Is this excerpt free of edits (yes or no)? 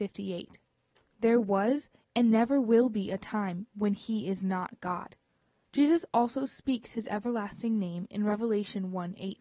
no